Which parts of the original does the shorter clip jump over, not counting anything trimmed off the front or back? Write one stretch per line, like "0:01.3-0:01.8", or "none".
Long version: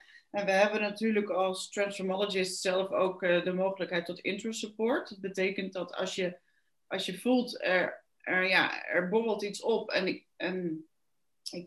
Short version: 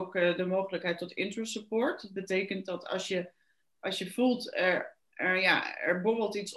none